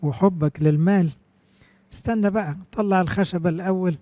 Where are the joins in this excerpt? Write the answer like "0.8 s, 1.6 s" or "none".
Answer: none